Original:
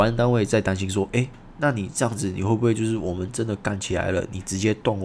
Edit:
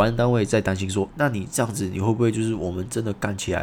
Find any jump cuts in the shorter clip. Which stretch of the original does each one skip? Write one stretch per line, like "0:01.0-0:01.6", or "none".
0:01.1-0:01.5